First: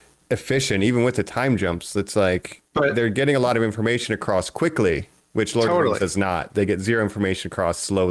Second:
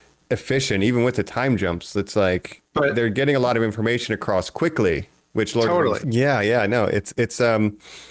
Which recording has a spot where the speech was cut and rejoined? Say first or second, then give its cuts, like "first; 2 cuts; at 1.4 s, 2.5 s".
second; 1 cut; at 6.0 s